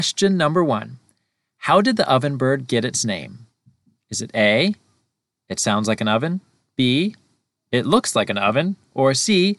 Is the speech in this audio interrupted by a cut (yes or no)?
no